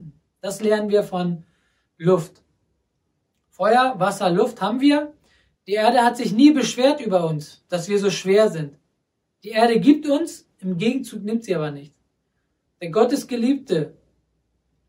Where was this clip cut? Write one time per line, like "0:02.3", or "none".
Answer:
0:05.5
0:12.7